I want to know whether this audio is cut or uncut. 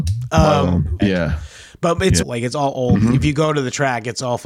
cut